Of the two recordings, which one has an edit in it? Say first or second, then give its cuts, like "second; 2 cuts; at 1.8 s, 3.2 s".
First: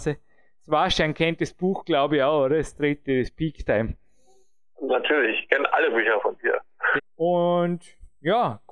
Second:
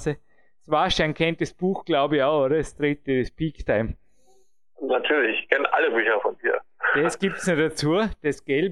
first; 1 cut; at 7.0 s